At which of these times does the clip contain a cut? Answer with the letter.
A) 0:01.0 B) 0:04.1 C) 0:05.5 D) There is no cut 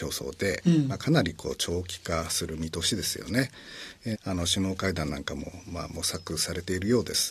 B